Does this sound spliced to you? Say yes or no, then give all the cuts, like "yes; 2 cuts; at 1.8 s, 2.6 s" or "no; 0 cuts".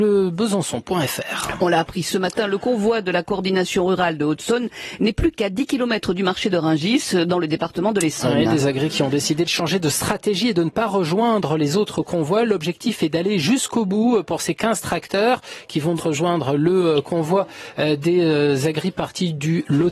yes; 1 cut; at 16.0 s